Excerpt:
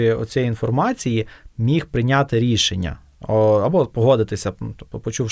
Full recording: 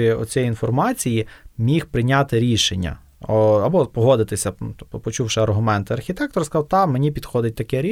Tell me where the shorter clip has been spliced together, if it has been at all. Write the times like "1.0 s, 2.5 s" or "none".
none